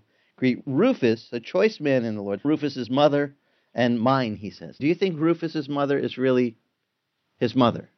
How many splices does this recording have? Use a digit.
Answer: 2